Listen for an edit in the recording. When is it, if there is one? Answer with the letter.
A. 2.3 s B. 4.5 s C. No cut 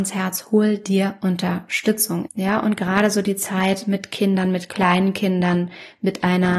A